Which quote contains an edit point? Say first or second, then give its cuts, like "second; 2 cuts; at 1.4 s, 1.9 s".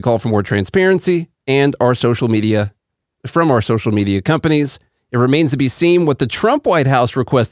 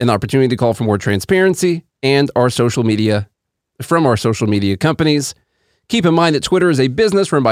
first; 1 cut; at 5.0 s